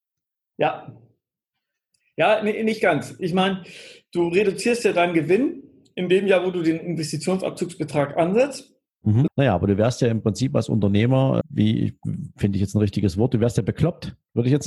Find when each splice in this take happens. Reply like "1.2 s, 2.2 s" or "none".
9.3 s, 11.4 s